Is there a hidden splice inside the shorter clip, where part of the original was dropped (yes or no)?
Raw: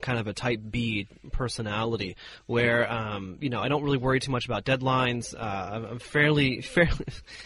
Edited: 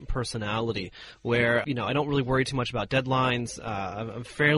yes